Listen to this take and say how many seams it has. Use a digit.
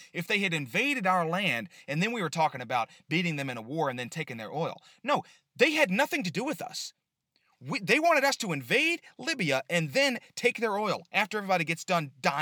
0